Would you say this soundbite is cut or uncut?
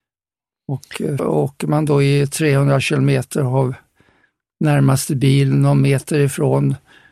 cut